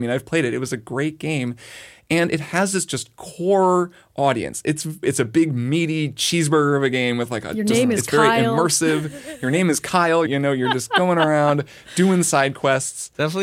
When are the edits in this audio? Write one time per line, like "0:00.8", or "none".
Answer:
0:10.3